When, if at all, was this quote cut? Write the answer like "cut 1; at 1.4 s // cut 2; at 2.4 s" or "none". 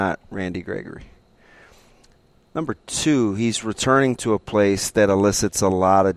none